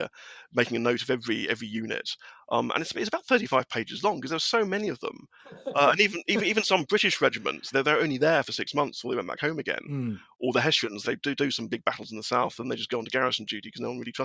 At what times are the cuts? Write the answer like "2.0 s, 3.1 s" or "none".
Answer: 7.7 s, 11.0 s